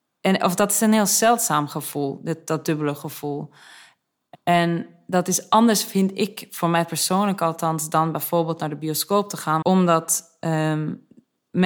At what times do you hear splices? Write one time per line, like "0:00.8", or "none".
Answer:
0:09.6